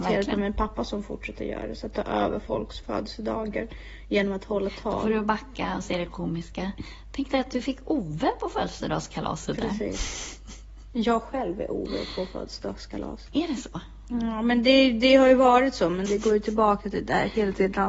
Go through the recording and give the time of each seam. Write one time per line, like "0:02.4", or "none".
0:16.1